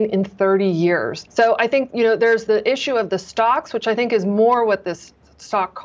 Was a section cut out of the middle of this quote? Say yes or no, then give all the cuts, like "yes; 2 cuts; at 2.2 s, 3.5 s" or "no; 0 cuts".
yes; 2 cuts; at 1.3 s, 2.5 s